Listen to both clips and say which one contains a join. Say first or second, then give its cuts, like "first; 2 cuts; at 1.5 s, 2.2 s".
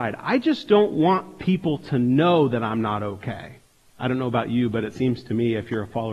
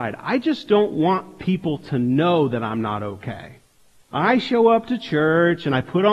first; 1 cut; at 3.8 s